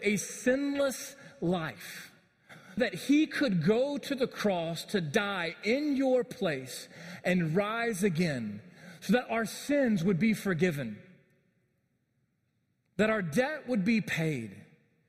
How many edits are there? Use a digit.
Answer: 1